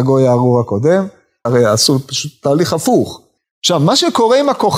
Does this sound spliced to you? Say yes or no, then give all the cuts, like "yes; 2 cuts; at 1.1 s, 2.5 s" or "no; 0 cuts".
yes; 2 cuts; at 1.5 s, 3.4 s